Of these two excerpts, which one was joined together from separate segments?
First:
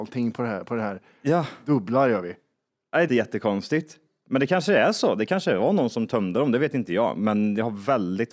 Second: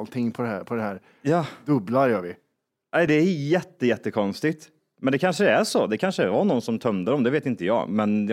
first; 1 cut; at 3.1 s

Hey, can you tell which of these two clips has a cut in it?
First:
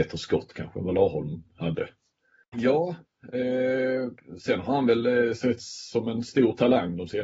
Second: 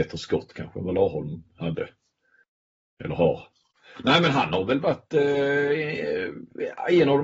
first; 1 cut; at 2.5 s

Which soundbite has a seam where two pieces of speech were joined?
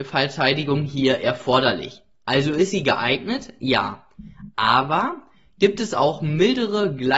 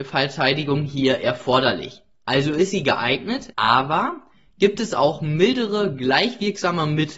second; 1 cut; at 3.5 s

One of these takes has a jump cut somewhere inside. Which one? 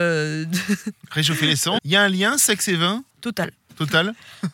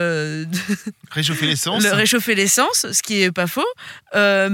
first; 2 cuts; at 1.8 s, 3.1 s

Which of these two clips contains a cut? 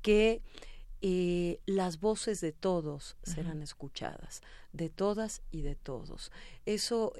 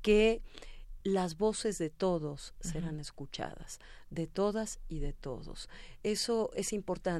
second; 1 cut; at 1.0 s

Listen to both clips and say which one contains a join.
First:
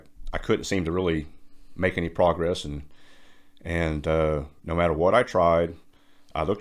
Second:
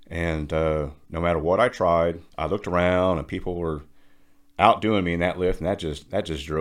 second; 1 cut; at 2.3 s

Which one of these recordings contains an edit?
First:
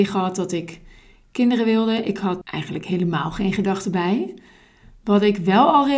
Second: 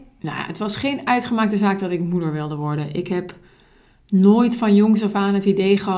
first; 1 cut; at 2.4 s

